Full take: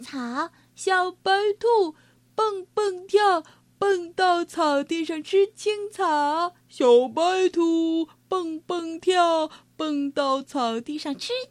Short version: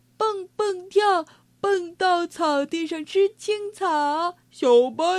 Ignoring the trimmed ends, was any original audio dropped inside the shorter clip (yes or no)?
no